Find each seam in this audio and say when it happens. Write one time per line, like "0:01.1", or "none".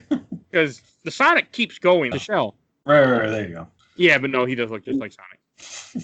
0:02.1